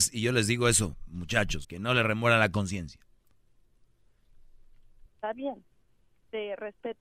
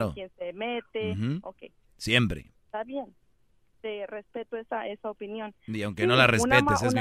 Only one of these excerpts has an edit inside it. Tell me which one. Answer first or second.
first